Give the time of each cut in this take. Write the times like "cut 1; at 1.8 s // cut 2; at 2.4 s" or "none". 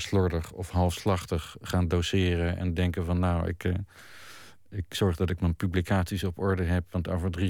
none